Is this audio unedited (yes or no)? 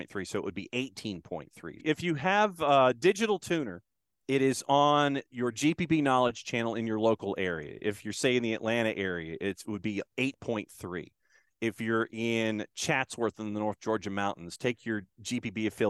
no